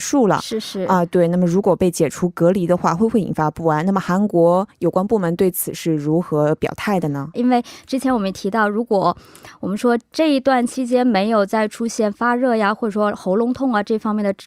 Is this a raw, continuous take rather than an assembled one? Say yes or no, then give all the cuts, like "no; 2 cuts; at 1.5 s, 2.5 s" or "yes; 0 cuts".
no; 1 cut; at 7.3 s